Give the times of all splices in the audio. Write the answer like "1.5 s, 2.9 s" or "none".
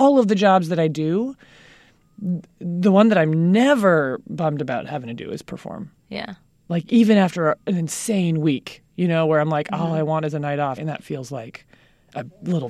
10.8 s